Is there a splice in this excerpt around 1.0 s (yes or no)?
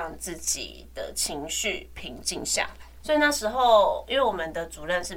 no